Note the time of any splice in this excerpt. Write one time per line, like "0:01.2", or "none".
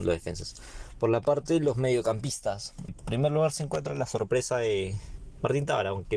0:02.9